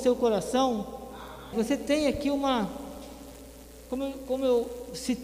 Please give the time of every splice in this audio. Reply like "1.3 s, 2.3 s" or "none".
1.5 s